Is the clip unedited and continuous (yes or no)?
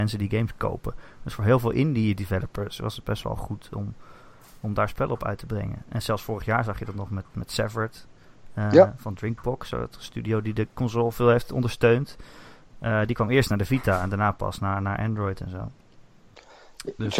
yes